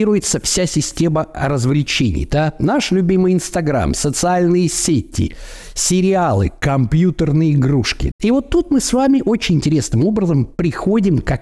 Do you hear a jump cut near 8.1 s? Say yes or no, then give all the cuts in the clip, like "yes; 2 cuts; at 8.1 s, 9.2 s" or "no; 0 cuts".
yes; 1 cut; at 8.1 s